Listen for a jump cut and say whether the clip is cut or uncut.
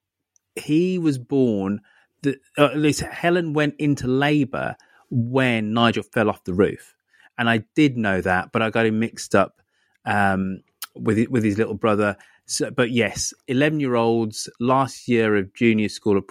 uncut